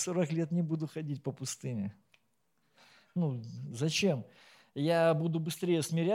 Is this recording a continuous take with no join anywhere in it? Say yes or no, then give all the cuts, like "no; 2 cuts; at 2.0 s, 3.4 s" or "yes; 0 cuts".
yes; 0 cuts